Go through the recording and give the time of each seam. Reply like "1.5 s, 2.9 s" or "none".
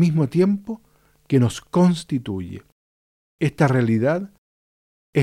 none